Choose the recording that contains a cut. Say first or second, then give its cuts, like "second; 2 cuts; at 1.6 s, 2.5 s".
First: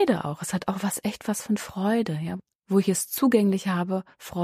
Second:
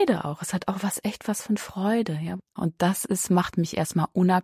second; 1 cut; at 2.6 s